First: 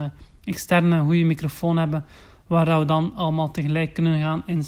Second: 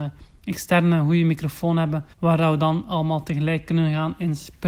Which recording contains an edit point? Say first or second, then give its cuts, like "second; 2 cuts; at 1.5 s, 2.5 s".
second; 1 cut; at 2.1 s